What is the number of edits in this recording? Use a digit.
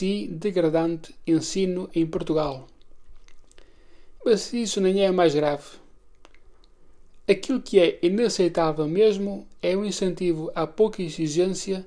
1